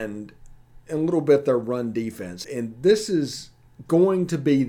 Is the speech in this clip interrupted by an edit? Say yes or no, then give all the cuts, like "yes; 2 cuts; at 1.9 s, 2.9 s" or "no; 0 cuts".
yes; 1 cut; at 2.4 s